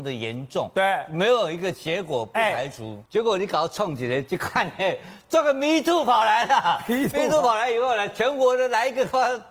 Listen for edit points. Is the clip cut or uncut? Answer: cut